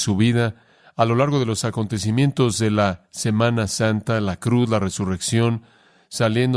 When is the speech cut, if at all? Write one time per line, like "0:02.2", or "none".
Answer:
none

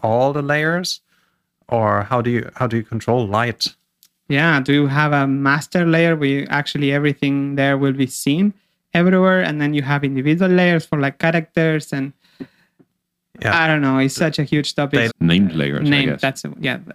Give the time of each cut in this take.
0:15.1

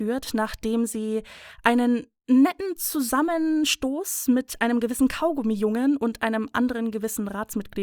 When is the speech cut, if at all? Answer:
none

